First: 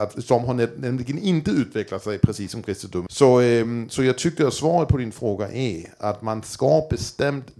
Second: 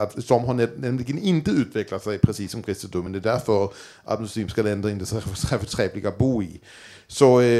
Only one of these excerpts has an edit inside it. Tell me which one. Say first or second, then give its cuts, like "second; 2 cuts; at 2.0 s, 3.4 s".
first; 2 cuts; at 3.1 s, 6.0 s